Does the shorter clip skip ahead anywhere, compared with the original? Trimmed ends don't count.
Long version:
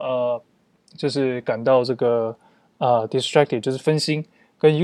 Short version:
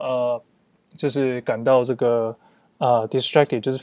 no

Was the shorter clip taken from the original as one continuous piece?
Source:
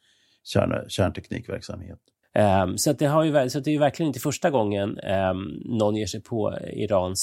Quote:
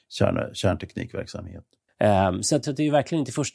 no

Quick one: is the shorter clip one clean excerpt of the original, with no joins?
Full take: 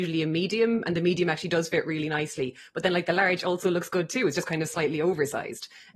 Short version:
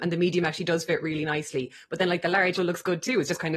no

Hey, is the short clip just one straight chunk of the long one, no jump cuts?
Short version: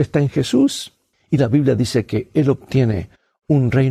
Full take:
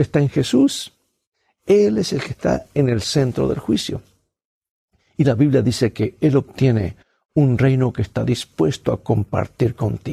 no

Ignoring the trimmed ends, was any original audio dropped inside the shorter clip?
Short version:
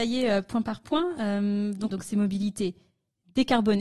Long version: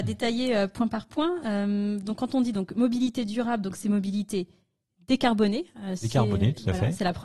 yes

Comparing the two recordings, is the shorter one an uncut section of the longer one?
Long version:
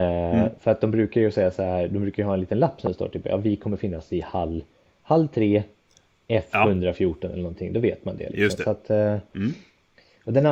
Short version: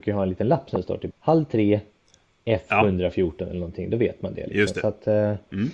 no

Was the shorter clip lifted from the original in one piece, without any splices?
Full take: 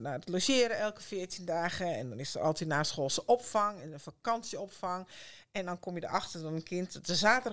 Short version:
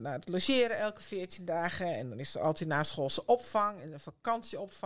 yes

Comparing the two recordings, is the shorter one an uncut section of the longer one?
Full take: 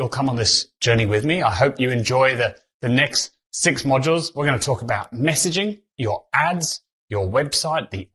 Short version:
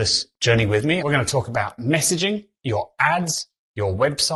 no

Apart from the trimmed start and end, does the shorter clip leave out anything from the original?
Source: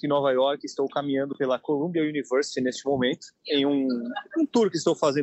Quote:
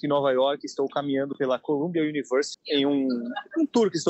yes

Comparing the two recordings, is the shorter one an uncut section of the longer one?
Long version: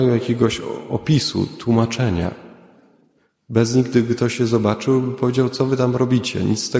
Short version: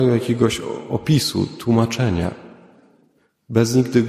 yes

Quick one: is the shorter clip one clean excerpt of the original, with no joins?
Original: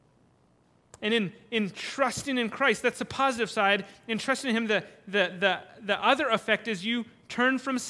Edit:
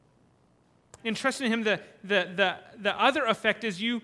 no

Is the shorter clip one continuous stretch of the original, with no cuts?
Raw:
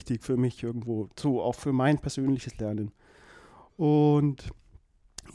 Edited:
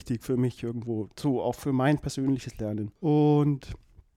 no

